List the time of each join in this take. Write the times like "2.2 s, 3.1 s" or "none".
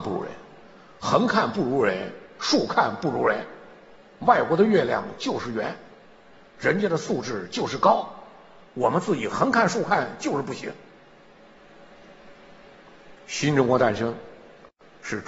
none